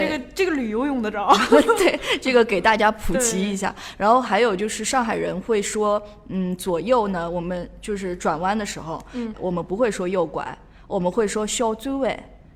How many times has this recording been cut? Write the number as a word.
one